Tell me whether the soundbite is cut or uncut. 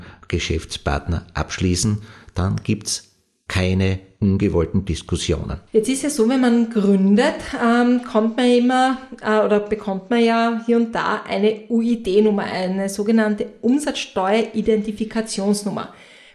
cut